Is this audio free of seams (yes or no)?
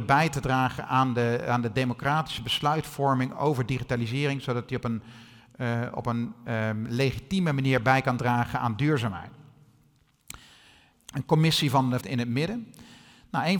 no